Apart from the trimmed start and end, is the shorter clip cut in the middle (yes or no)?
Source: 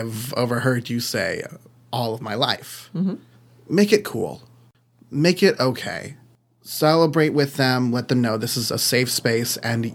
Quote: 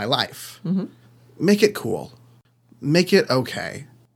no